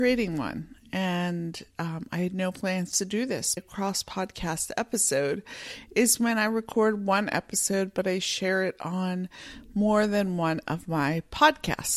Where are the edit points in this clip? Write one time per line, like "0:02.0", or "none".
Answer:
0:03.6